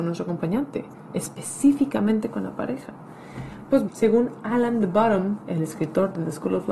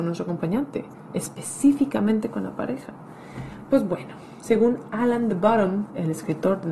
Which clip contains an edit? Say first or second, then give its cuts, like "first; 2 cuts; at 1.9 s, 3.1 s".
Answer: first; 1 cut; at 3.9 s